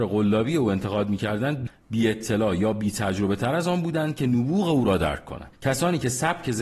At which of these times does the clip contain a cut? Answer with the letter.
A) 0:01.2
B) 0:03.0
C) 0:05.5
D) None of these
C